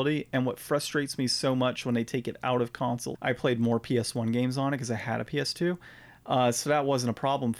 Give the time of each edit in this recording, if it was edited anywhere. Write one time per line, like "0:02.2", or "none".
0:03.1